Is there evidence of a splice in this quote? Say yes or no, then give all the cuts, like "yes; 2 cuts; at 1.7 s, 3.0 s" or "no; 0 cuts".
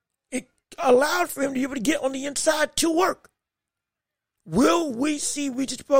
yes; 1 cut; at 4.3 s